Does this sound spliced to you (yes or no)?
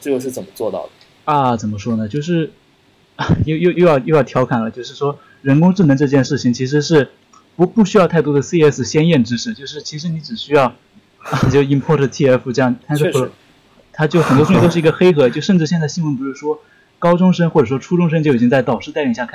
yes